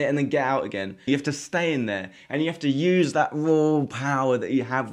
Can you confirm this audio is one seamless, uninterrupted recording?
no; 1 cut; at 1.1 s

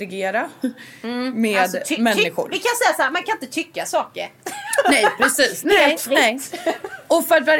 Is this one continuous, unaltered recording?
yes; 0 cuts

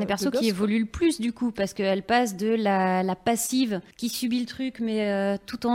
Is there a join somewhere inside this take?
yes; 1 cut; at 3.9 s

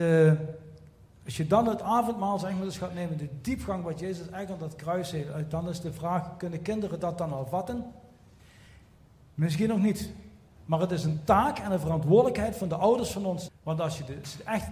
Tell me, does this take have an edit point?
yes; 1 cut; at 13.5 s

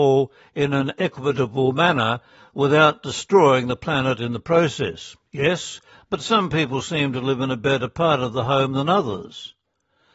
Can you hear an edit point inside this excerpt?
yes; 1 cut; at 5.9 s

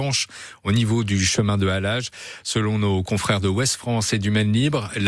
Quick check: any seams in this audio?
no; 0 cuts

